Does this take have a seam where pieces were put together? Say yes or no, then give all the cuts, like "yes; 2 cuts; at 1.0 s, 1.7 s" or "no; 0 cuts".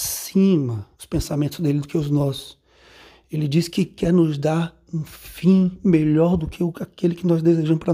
yes; 1 cut; at 0.9 s